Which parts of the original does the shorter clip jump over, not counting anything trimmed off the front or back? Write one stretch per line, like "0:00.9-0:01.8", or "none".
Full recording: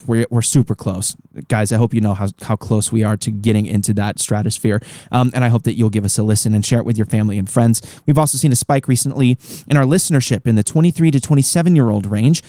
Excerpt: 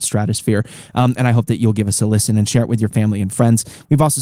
none